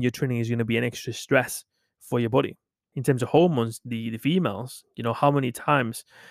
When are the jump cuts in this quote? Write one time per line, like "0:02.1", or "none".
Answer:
0:02.9